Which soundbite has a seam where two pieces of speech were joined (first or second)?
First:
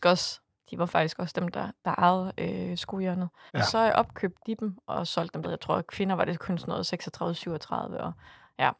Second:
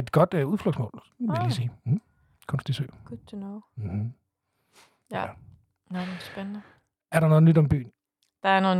first